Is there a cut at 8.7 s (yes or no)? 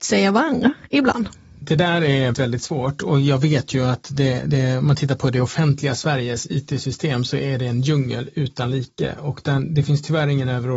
no